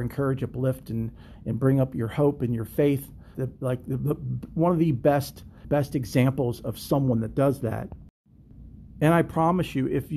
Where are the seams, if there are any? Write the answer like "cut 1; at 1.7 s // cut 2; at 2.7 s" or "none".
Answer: cut 1; at 3.3 s // cut 2; at 5.6 s